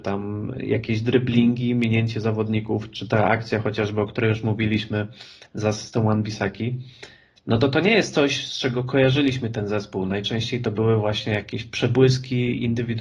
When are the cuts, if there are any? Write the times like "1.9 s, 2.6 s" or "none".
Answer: none